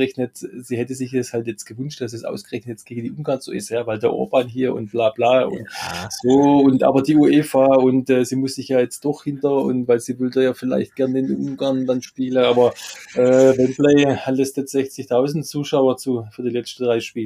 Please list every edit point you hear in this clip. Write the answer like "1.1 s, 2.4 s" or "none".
none